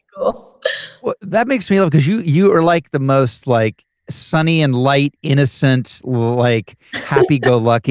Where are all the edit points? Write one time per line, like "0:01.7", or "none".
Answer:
none